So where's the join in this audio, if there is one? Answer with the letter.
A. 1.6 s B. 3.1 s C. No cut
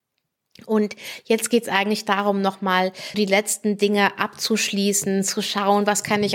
B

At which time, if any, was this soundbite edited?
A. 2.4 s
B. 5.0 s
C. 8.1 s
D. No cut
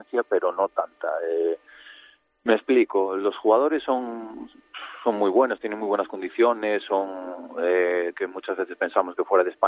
C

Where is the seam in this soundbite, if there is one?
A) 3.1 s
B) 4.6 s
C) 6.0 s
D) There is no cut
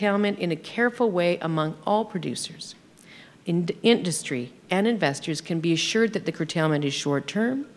D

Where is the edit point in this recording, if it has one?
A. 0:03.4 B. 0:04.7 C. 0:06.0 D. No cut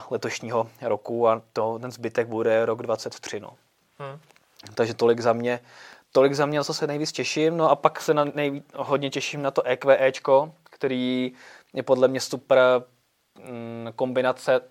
D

